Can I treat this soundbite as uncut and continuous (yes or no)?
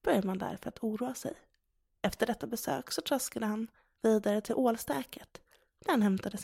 no